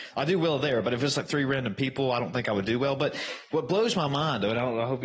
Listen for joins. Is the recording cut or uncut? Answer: uncut